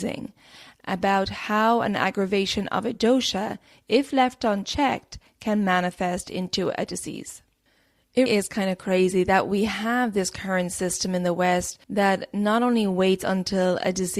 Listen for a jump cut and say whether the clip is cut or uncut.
cut